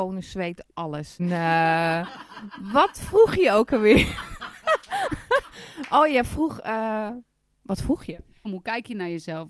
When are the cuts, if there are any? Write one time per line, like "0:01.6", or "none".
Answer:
0:01.2
0:08.4